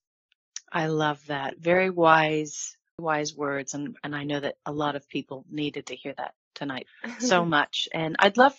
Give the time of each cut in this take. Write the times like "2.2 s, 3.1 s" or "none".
3.0 s, 6.9 s

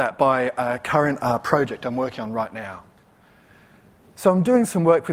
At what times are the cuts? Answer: none

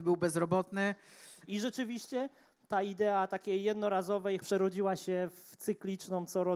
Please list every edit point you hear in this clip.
1.5 s, 4.4 s

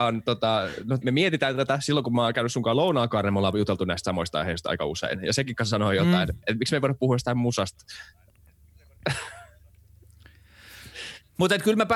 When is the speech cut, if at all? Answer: 1.0 s

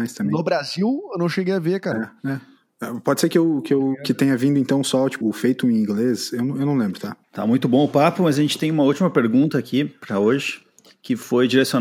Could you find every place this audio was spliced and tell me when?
5.2 s, 7.2 s

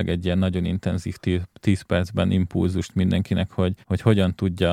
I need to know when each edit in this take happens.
3.8 s

